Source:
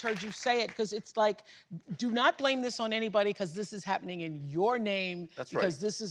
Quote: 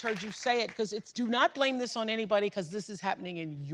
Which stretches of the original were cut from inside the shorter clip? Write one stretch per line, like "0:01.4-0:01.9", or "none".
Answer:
0:01.1-0:02.0